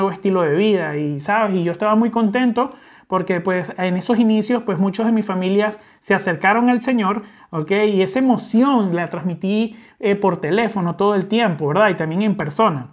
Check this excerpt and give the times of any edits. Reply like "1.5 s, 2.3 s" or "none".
none

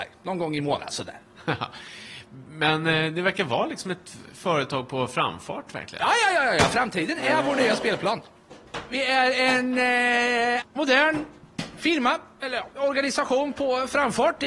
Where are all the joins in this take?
10.6 s

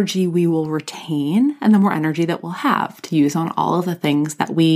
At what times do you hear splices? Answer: none

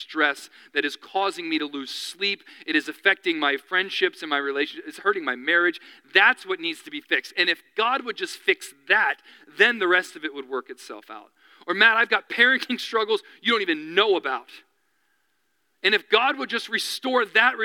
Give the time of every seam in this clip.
none

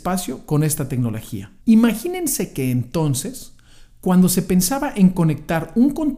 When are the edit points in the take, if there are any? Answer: 1.6 s

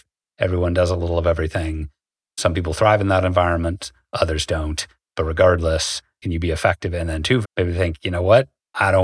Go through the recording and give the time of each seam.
6.2 s, 7.4 s

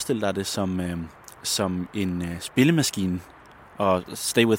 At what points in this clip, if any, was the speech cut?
none

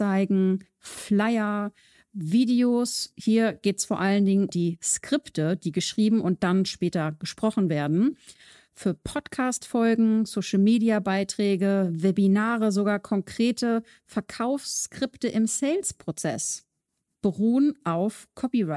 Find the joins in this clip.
4.5 s

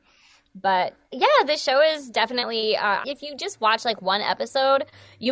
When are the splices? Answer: 3.0 s

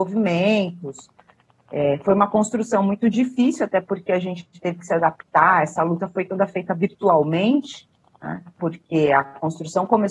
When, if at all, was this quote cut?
8.6 s

